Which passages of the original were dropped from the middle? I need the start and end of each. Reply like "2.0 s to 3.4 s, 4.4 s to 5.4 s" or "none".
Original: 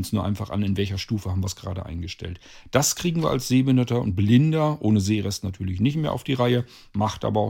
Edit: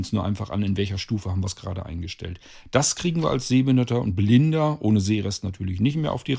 none